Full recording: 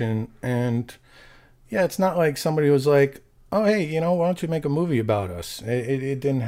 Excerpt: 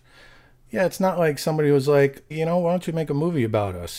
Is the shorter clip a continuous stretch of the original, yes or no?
no